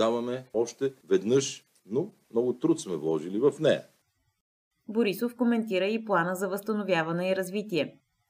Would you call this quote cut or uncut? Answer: cut